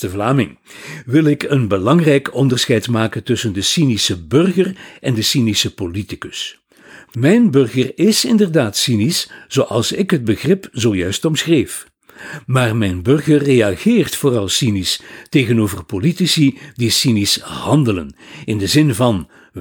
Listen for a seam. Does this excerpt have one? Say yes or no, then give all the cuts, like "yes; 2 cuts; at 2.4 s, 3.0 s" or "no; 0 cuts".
no; 0 cuts